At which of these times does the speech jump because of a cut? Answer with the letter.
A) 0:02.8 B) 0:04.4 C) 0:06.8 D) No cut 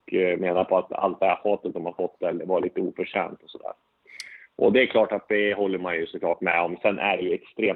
D